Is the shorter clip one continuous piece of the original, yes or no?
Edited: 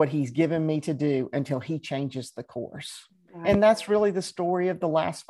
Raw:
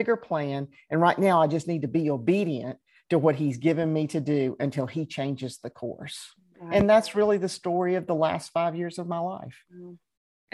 yes